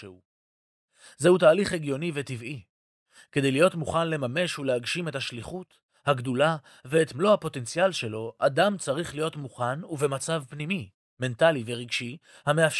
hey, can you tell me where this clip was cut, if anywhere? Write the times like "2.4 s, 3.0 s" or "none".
none